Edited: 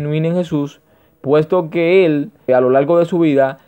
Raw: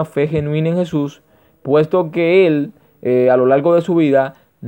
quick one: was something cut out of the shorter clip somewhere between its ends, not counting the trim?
yes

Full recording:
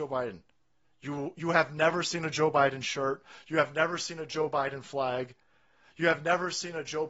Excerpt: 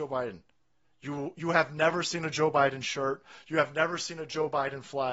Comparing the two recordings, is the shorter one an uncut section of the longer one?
yes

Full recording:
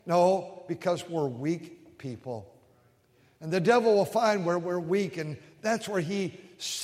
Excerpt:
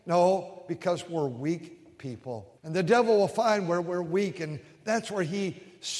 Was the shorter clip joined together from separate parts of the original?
yes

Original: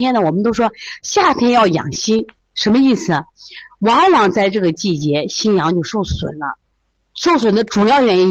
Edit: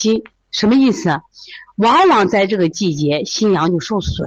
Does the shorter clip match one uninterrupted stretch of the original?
yes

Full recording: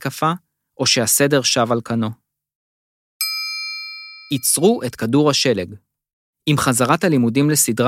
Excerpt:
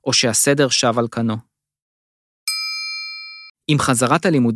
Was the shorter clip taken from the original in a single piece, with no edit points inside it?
no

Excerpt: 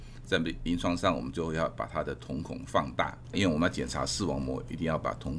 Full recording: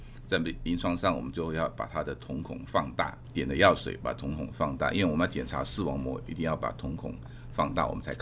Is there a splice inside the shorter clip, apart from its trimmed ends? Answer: yes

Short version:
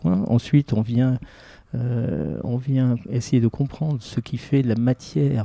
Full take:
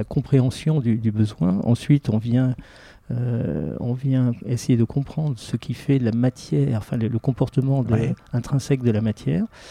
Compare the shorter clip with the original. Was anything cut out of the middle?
no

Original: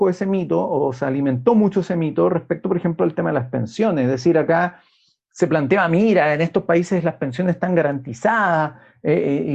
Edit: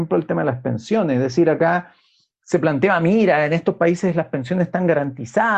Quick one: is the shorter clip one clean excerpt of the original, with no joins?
yes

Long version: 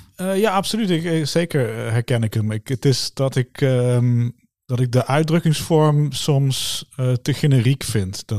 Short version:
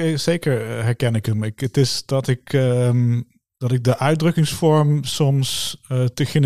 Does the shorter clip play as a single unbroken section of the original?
yes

